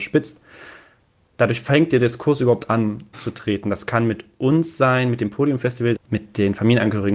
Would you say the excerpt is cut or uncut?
cut